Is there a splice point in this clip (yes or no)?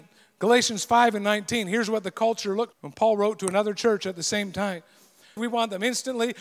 yes